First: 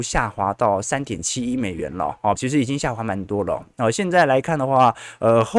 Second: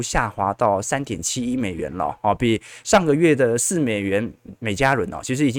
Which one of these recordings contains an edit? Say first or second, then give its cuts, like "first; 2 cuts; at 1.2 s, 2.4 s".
first; 1 cut; at 2.4 s